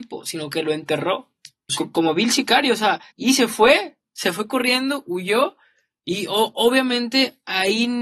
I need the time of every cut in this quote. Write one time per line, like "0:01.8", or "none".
0:01.7
0:03.1